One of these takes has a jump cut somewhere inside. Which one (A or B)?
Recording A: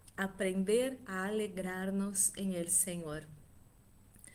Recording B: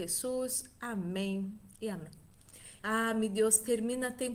B